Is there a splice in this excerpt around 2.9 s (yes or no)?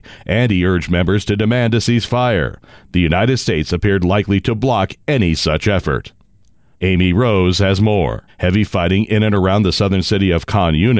no